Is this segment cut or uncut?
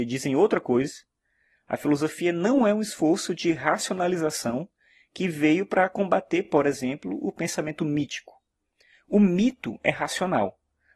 uncut